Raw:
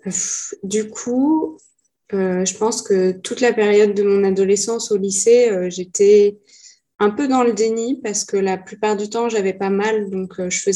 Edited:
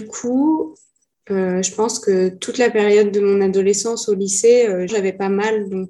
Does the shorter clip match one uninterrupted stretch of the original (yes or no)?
no